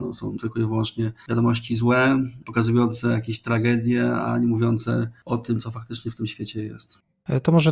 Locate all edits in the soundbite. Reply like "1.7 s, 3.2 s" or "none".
none